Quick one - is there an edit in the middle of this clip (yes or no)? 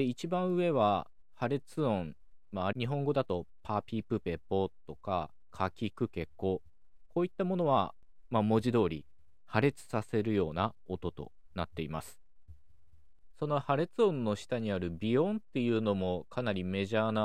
yes